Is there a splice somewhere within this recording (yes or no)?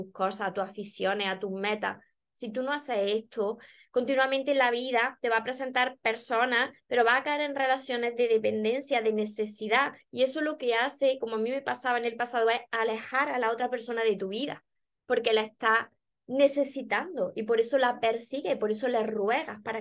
no